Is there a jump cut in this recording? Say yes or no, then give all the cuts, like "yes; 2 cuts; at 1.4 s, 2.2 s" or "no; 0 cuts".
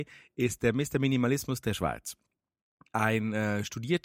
no; 0 cuts